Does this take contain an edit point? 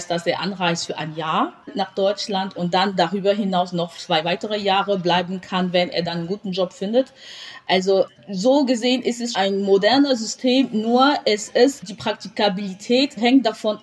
yes; 2 cuts; at 1.6 s, 9.3 s

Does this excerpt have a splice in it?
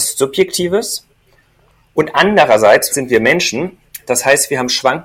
yes; 1 cut; at 2.9 s

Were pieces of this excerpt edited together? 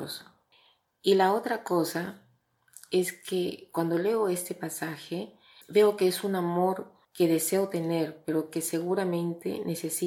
yes; 2 cuts; at 5.6 s, 7.0 s

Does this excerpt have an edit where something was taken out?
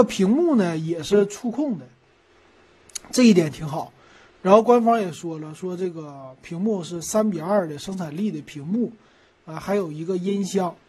no; 0 cuts

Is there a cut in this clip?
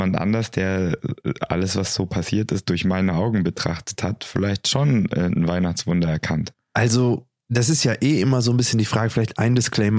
yes; 1 cut; at 6.5 s

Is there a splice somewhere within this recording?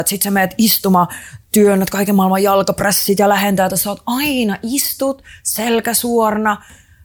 yes; 1 cut; at 3.7 s

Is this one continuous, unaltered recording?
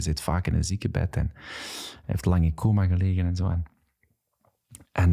yes; 0 cuts

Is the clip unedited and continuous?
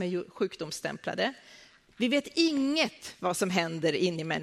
no; 1 cut; at 1.9 s

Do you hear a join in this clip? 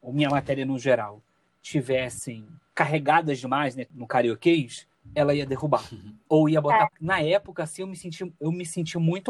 yes; 1 cut; at 6.9 s

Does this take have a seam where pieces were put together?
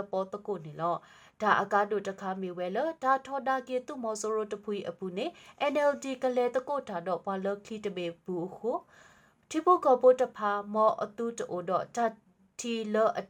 no; 0 cuts

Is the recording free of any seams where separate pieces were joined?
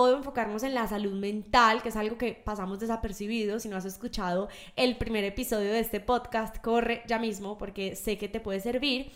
yes; 0 cuts

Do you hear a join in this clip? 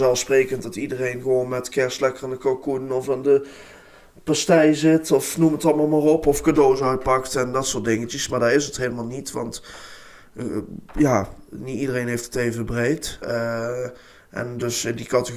yes; 1 cut; at 13.2 s

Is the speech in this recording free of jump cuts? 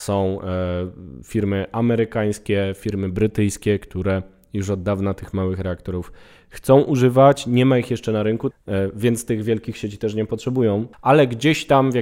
no; 2 cuts; at 8.5 s, 10.9 s

